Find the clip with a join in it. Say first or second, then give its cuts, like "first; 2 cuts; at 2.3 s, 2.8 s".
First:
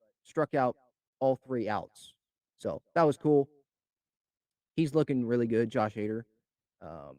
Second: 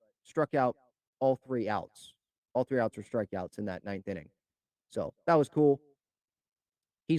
first; 1 cut; at 2.4 s